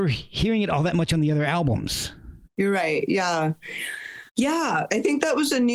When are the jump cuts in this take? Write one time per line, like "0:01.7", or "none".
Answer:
0:02.5
0:04.3

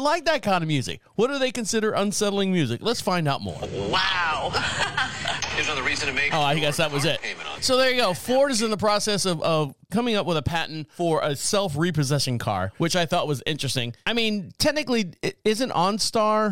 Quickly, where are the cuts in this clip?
0:05.4

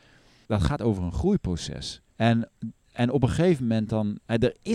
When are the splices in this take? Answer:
0:02.1

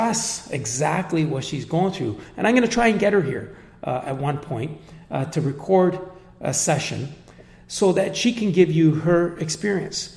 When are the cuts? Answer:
none

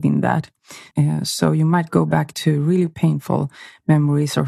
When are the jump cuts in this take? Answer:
0:00.9

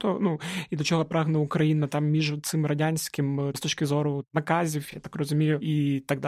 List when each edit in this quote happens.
none

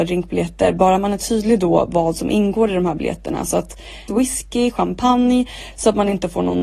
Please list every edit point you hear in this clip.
0:04.1

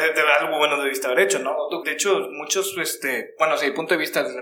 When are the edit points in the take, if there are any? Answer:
0:01.8

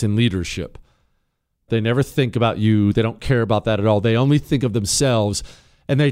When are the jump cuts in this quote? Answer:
0:01.7

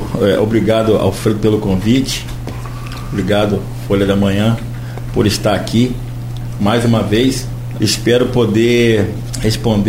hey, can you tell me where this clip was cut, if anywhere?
0:07.7

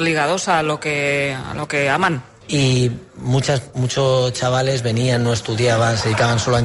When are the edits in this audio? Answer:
0:02.4

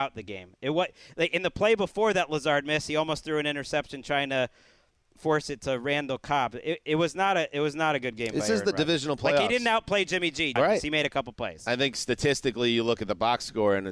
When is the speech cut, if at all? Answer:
0:10.6

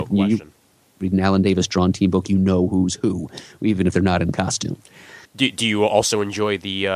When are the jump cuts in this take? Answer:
0:05.3

